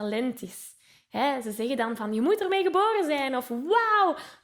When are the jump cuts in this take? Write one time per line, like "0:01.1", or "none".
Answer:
none